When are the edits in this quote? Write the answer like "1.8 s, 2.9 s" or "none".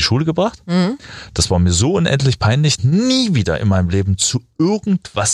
2.8 s